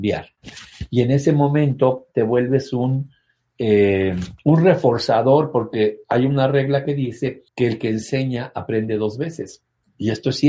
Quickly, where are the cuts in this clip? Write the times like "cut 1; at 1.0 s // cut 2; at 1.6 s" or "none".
cut 1; at 7.5 s